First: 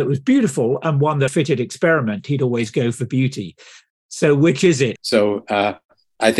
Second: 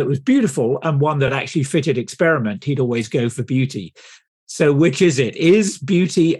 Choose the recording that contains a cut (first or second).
first